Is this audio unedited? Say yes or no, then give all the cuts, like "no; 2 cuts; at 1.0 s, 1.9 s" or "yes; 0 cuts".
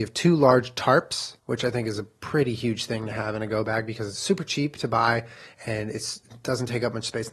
no; 1 cut; at 1.4 s